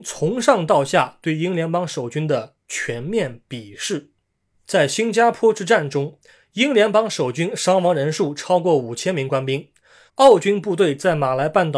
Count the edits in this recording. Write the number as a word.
two